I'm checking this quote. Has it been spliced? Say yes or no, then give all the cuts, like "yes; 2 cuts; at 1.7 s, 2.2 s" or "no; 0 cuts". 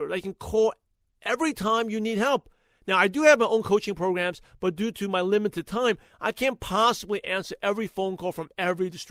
no; 0 cuts